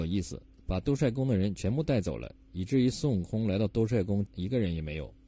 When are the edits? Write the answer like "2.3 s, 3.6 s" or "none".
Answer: 4.3 s